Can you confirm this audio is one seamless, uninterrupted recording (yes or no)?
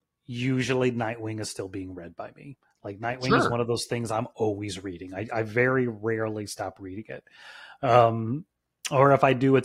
yes